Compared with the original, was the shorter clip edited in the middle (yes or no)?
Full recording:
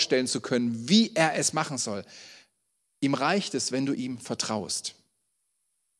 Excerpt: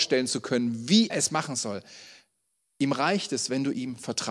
yes